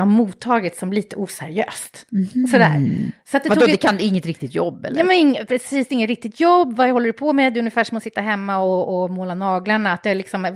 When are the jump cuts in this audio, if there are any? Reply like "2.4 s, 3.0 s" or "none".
none